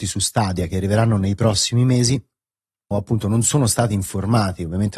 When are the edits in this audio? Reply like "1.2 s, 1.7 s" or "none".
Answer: 2.9 s